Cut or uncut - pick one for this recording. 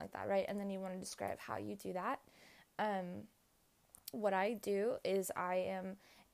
cut